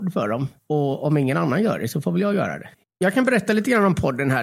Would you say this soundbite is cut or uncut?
cut